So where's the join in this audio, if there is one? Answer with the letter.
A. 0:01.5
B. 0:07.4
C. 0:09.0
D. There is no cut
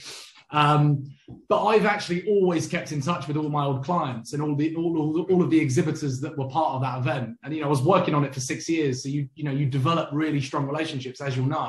D